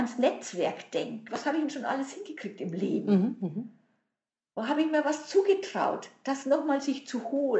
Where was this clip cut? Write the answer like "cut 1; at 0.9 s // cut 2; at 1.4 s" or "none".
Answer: cut 1; at 1.3 s